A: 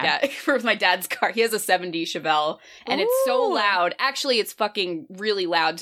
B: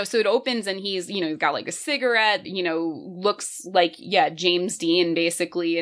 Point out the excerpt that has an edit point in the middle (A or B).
B